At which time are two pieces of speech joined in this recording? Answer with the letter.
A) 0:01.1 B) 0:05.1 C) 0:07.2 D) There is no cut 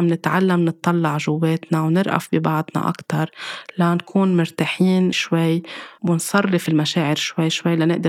B